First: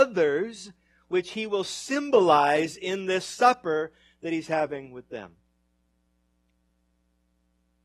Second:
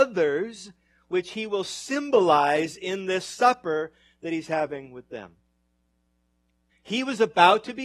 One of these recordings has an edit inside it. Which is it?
second; 1 cut; at 6.7 s

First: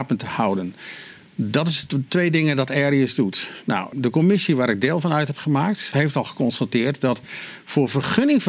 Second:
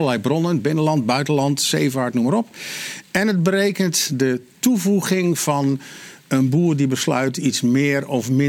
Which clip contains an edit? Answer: first; 2 cuts; at 3.9 s, 5.9 s

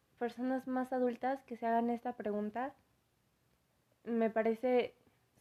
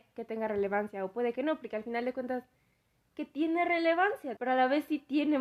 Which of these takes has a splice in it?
second; 1 cut; at 4.4 s

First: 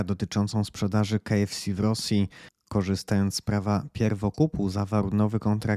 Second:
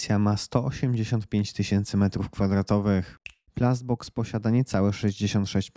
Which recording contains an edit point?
second; 1 cut; at 3.5 s

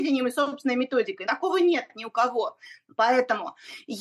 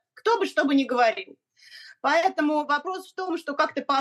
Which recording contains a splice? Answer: first; 2 cuts; at 1.2 s, 2.9 s

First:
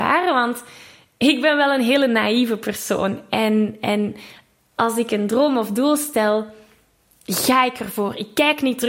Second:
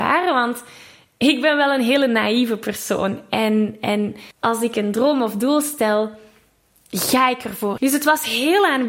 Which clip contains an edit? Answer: second; 2 cuts; at 4.3 s, 7.8 s

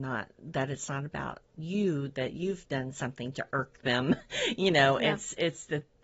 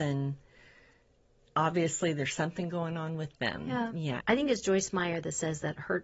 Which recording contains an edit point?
second; 1 cut; at 4.2 s

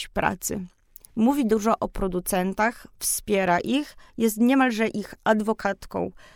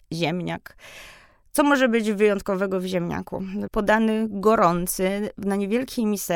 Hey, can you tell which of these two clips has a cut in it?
second; 1 cut; at 3.7 s

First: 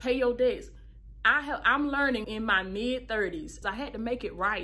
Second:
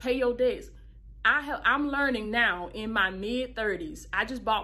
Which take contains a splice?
first; 2 cuts; at 2.2 s, 3.6 s

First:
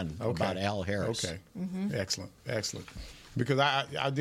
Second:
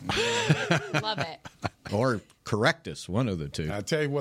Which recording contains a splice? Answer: second; 1 cut; at 1.9 s

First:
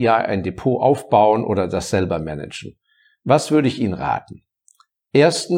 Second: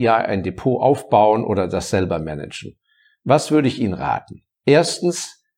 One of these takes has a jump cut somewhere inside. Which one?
second; 1 cut; at 4.5 s

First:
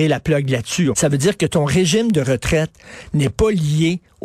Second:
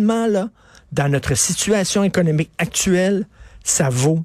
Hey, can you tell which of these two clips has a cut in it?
first; 1 cut; at 0.9 s

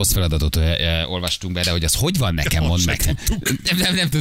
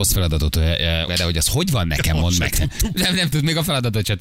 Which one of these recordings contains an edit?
second; 2 cuts; at 1.1 s, 3.0 s

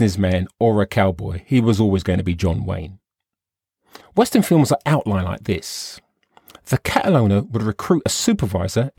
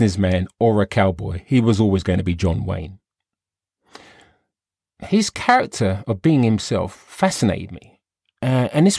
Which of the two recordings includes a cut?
first; 1 cut; at 4.0 s

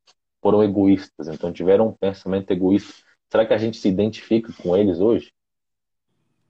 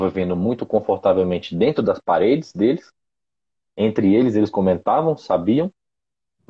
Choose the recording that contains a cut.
second; 1 cut; at 3.6 s

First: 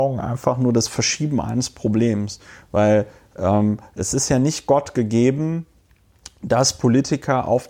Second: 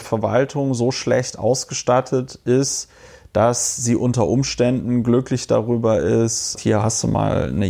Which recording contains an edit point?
second; 1 cut; at 6.5 s

